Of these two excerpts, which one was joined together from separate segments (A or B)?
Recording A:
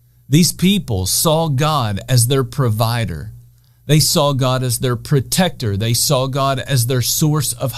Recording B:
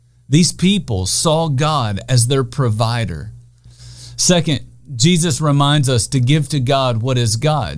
B